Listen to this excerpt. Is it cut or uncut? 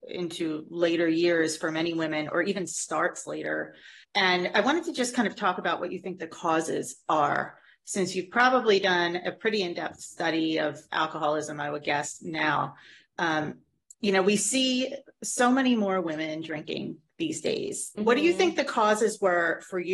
cut